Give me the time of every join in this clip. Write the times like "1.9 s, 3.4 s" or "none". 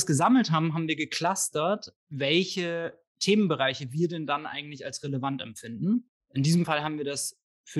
2.0 s

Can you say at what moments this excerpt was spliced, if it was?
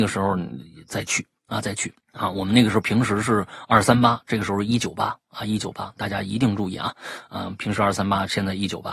2.0 s

